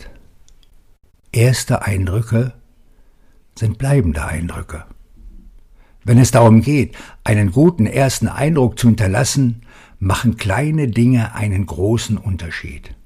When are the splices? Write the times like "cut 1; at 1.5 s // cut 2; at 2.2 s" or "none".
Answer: none